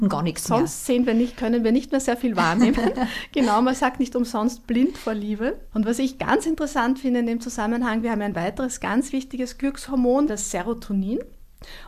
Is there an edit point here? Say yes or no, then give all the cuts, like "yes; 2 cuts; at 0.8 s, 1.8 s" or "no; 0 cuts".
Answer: yes; 2 cuts; at 5.7 s, 10.3 s